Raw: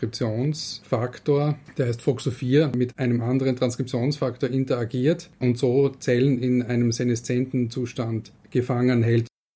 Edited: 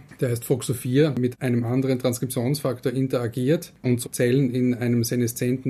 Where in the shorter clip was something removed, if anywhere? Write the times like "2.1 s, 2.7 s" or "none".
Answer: 4.0 s